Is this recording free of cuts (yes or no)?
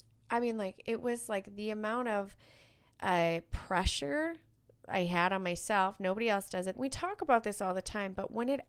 no